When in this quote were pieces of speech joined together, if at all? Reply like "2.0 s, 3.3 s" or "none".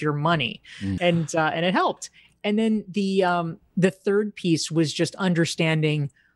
1.0 s